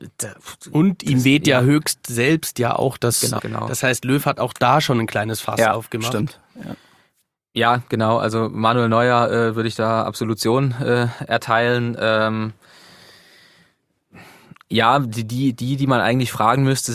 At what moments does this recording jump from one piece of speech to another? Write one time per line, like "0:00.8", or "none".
0:03.4